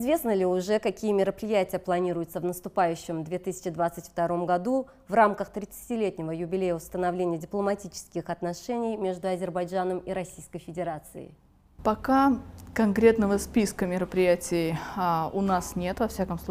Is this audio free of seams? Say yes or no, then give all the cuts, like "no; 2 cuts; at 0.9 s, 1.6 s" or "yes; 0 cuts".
yes; 0 cuts